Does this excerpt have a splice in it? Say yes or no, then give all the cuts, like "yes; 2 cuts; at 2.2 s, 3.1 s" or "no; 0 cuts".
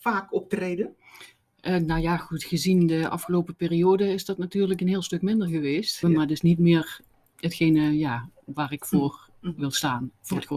yes; 1 cut; at 6.0 s